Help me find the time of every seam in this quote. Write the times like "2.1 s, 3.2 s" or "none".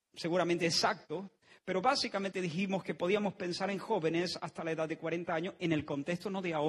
none